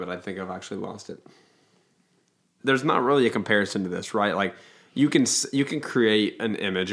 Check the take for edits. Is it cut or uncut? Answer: cut